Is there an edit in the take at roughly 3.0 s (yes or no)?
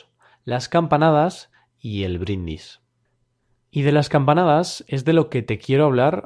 no